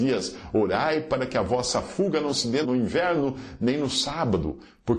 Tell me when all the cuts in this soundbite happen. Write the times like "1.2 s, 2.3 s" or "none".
2.6 s